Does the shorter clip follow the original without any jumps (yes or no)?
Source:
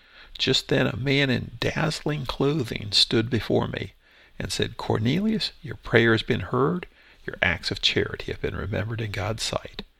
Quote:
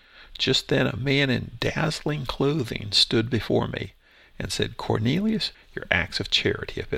no